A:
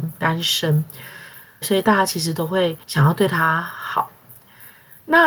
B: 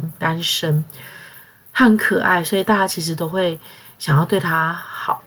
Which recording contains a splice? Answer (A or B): A